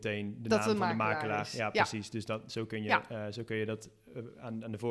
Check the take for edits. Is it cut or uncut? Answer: uncut